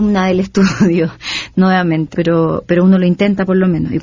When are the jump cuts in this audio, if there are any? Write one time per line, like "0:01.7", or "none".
0:02.1